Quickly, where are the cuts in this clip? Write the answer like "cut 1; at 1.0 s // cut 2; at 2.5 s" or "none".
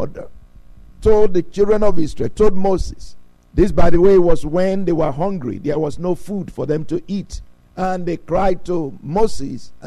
none